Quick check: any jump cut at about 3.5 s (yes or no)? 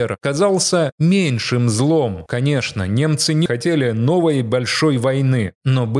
yes